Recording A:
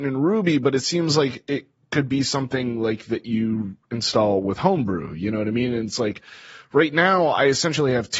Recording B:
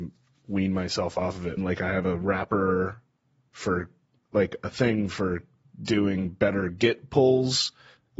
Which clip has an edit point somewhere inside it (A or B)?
B